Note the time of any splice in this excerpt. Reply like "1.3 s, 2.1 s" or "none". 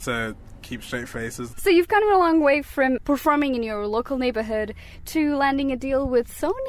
1.5 s